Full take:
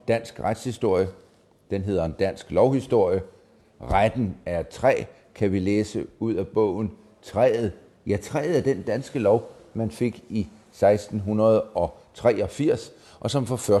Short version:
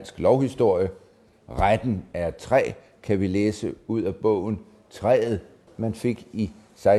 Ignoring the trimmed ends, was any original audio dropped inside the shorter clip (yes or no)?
yes